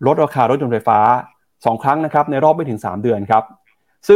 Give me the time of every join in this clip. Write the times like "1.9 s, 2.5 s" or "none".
none